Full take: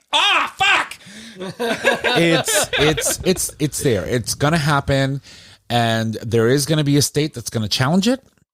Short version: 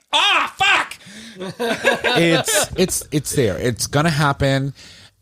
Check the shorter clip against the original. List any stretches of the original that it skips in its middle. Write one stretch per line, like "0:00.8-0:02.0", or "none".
0:02.7-0:03.2